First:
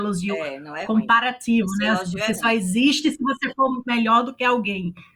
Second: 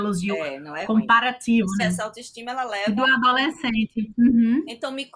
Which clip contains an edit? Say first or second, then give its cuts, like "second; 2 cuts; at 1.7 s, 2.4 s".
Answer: second; 1 cut; at 1.8 s